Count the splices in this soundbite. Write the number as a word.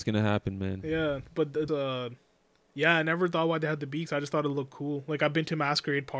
one